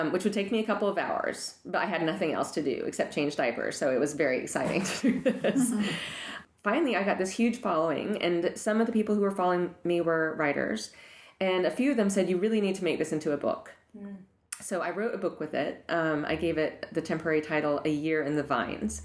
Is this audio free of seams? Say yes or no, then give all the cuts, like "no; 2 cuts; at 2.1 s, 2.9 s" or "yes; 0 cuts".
yes; 0 cuts